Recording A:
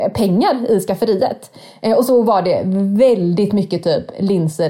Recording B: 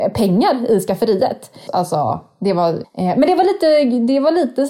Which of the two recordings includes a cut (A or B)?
B